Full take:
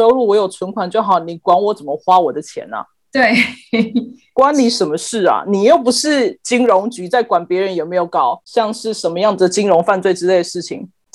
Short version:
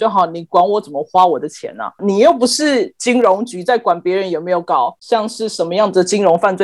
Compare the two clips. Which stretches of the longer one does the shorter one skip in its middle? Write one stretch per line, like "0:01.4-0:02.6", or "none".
0:02.9-0:05.4

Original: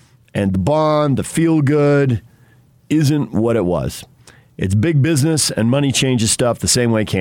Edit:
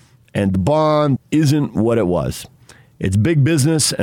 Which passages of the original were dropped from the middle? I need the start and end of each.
0:01.2-0:02.7

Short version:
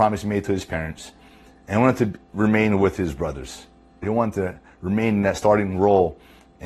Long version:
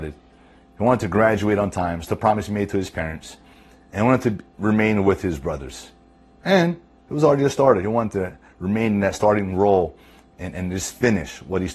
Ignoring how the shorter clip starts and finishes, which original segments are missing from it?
0:06.3-0:07.8

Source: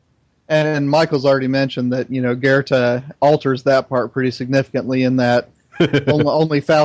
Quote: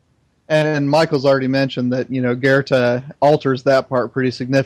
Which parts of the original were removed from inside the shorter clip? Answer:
none

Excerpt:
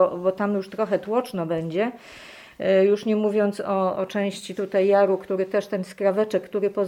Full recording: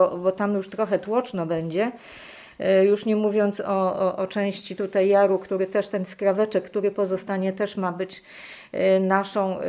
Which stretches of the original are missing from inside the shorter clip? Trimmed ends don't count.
0:04.0-0:04.2

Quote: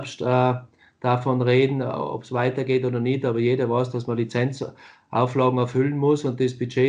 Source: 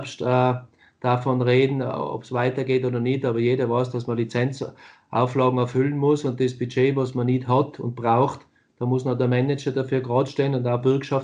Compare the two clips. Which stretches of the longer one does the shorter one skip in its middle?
none

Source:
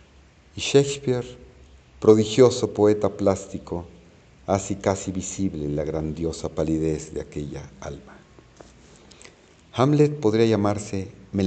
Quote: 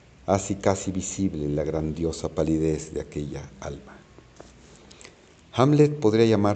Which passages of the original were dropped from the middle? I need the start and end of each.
none

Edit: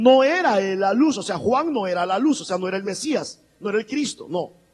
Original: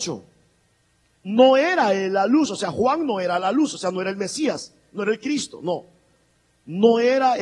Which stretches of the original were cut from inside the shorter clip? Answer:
none

